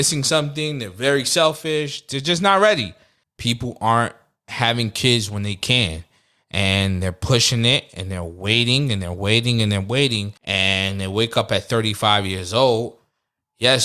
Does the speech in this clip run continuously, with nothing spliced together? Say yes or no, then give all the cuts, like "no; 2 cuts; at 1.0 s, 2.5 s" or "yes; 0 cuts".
no; 2 cuts; at 3.2 s, 10.4 s